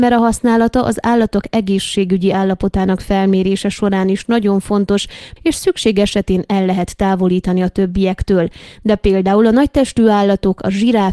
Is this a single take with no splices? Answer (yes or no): no